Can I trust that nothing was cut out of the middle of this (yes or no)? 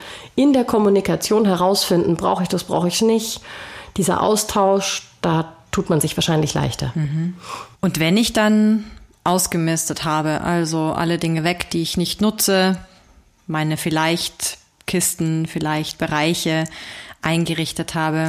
yes